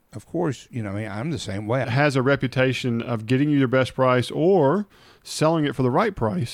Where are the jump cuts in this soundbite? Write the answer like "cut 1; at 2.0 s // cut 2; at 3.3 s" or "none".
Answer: cut 1; at 1.8 s